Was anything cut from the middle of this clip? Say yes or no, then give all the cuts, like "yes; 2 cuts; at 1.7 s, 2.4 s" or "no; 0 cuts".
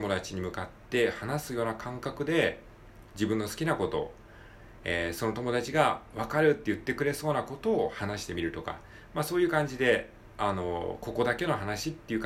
no; 0 cuts